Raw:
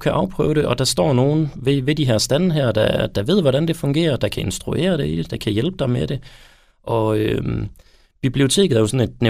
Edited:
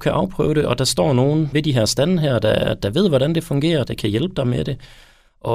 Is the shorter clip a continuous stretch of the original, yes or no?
no